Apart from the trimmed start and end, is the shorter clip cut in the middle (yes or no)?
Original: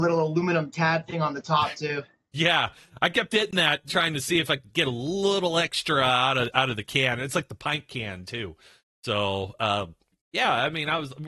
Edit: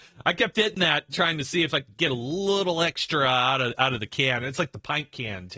no